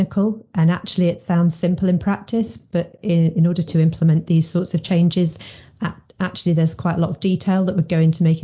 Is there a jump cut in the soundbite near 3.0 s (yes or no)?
no